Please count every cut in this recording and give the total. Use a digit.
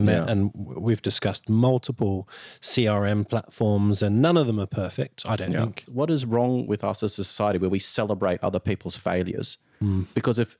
1